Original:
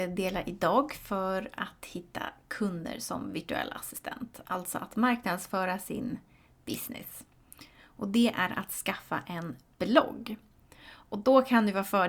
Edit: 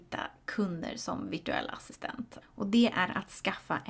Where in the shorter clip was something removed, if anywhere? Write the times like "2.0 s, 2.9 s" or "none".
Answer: 2.4 s